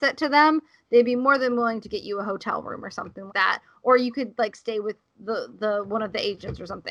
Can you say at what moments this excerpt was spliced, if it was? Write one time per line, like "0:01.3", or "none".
0:03.3